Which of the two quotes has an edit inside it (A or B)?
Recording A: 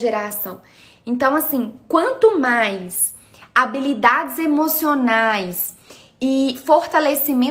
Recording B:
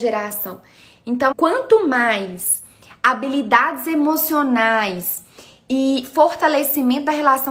B